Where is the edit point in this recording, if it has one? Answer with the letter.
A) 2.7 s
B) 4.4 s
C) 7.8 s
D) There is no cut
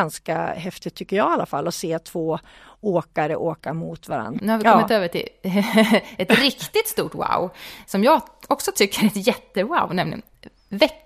B